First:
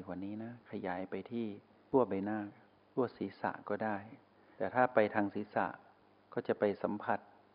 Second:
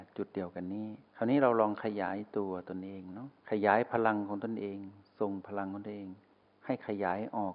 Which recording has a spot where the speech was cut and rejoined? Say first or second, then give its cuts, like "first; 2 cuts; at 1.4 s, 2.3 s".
second; 2 cuts; at 1.1 s, 3.4 s